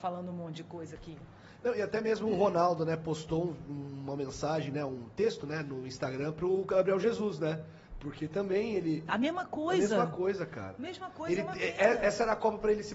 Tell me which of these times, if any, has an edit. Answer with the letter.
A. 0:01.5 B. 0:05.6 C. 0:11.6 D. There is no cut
D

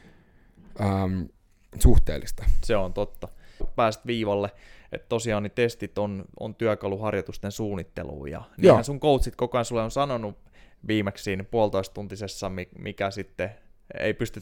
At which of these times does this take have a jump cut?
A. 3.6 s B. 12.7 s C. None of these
A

